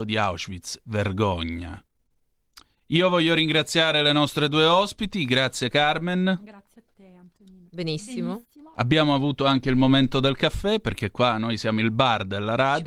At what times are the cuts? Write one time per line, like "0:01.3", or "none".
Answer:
0:07.7